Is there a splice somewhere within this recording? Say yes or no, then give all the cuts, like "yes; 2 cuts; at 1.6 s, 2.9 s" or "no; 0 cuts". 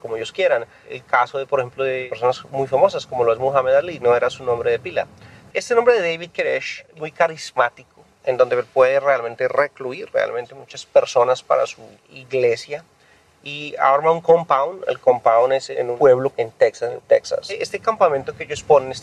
yes; 2 cuts; at 5.5 s, 17.0 s